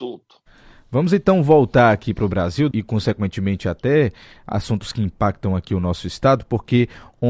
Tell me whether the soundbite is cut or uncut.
cut